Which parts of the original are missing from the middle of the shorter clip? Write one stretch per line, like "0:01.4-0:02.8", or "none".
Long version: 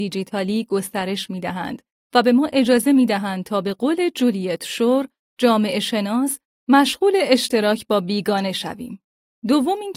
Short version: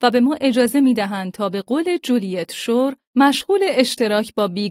0:05.2-0:06.6